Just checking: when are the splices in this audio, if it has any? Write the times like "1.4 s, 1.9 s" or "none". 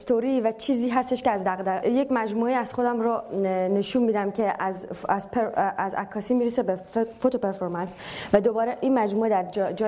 1.8 s